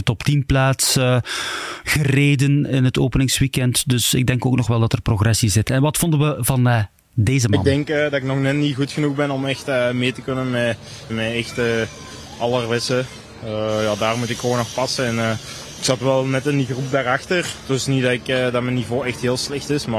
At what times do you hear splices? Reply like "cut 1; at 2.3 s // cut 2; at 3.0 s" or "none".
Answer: cut 1; at 11.1 s